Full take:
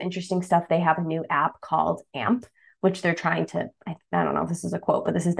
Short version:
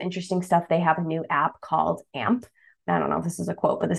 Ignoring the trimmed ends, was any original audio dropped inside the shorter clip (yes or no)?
yes